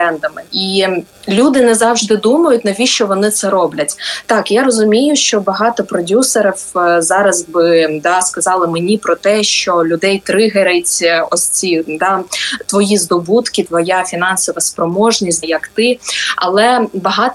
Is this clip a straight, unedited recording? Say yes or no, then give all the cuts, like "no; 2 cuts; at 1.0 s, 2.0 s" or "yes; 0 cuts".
no; 2 cuts; at 13.6 s, 15.4 s